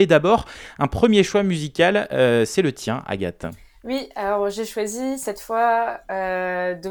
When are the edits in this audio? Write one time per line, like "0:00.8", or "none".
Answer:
none